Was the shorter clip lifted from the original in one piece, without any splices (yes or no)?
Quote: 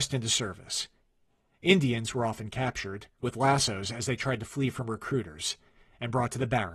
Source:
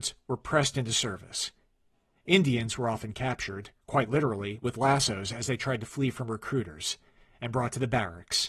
no